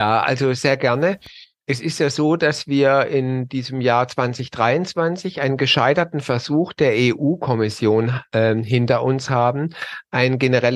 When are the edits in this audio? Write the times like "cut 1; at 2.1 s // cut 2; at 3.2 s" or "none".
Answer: none

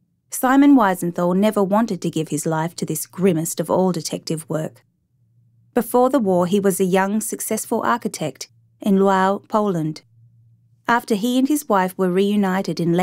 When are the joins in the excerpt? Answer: none

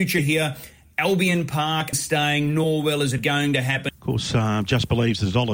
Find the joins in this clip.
cut 1; at 1.9 s // cut 2; at 3.9 s

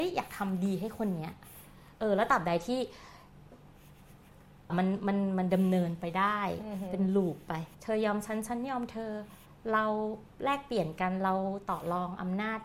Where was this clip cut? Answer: cut 1; at 4.7 s // cut 2; at 7.7 s

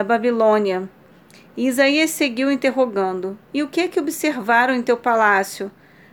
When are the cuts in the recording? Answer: none

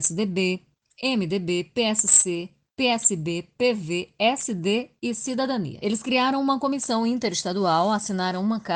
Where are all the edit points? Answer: none

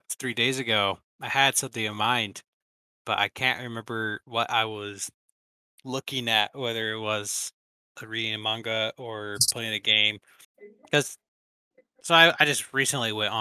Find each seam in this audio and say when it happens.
none

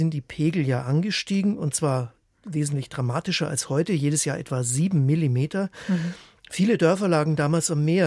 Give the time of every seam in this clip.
none

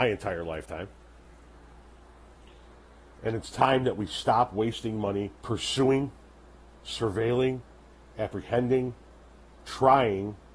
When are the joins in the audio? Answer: cut 1; at 5.4 s

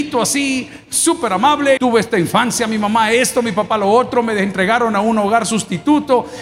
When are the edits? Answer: cut 1; at 1.8 s

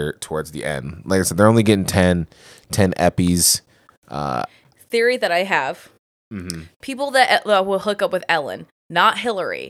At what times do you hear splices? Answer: none

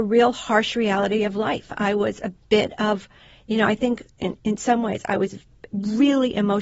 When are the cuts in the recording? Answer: none

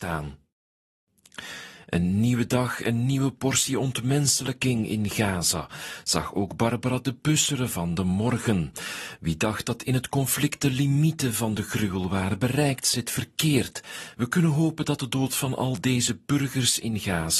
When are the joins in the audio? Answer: cut 1; at 14.1 s

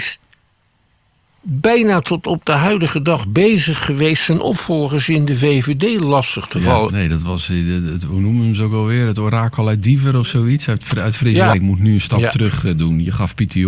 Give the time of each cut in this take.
cut 1; at 6.9 s // cut 2; at 11.5 s

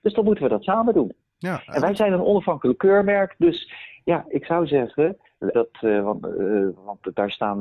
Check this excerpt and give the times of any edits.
cut 1; at 5.5 s

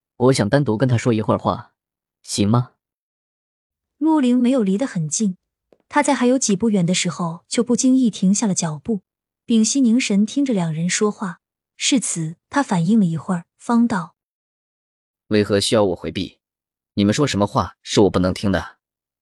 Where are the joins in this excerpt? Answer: none

